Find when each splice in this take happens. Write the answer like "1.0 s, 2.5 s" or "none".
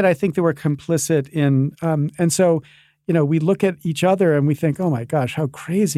1.7 s